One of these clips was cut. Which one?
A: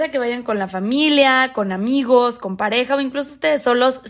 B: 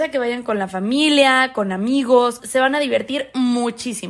B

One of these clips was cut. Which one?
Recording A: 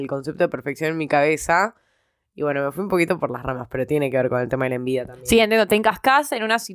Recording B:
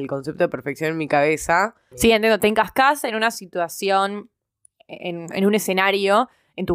B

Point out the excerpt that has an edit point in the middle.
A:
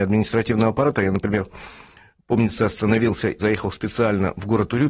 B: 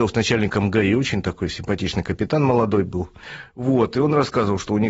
A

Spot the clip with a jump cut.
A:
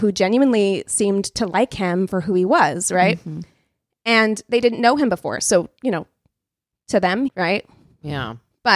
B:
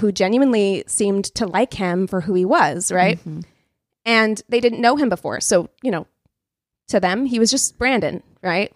A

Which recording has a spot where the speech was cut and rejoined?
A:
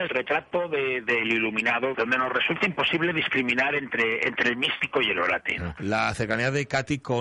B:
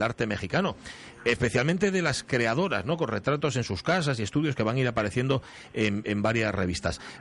A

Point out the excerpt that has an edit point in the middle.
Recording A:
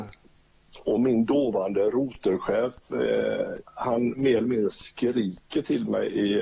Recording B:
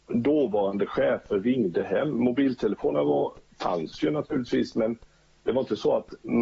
A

